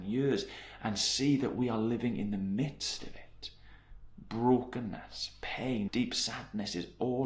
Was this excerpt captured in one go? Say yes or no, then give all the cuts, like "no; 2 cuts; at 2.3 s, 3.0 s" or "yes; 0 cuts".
no; 1 cut; at 5.9 s